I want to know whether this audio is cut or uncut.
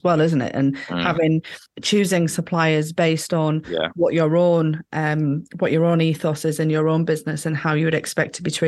uncut